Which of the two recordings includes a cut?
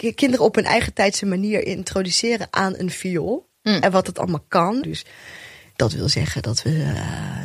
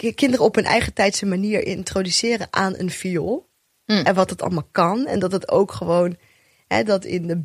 first; 2 cuts; at 3.6 s, 4.8 s

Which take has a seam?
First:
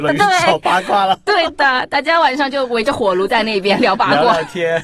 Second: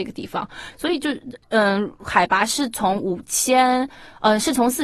second; 1 cut; at 1.4 s

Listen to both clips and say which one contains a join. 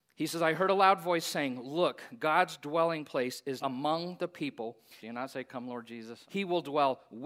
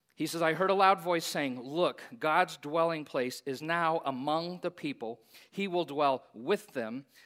first; 3 cuts; at 3.6 s, 5.0 s, 6.2 s

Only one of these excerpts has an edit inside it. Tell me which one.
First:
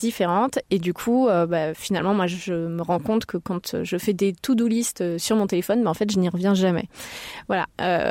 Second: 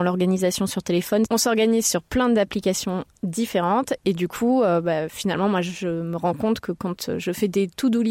second; 1 cut; at 1.3 s

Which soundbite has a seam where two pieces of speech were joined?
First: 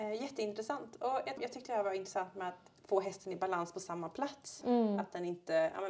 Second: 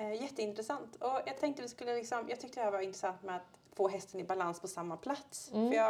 first; 2 cuts; at 1.4 s, 4.6 s

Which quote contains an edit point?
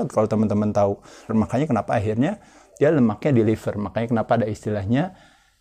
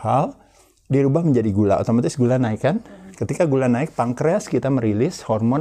first; 1 cut; at 1.3 s

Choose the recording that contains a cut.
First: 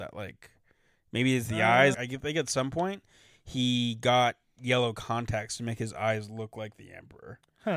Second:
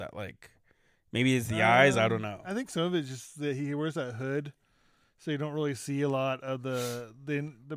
first; 1 cut; at 1.9 s

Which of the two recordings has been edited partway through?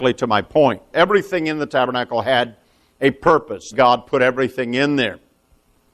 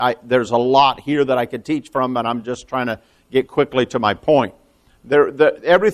first; 2 cuts; at 0.9 s, 3.7 s

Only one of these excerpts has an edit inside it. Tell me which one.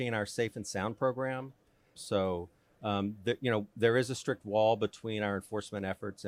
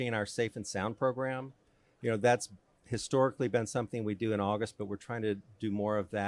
first; 1 cut; at 1.9 s

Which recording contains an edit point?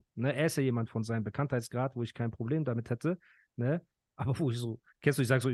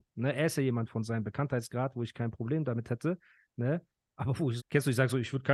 second; 1 cut; at 4.6 s

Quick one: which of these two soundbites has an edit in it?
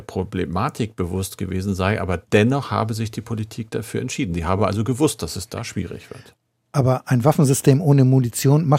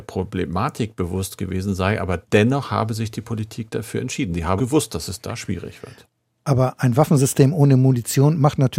second; 1 cut; at 4.6 s

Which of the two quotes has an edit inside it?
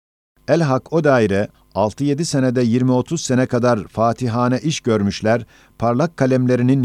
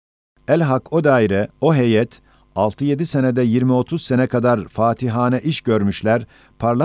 first; 1 cut; at 1.5 s

